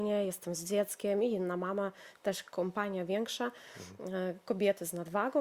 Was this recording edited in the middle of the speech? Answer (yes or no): no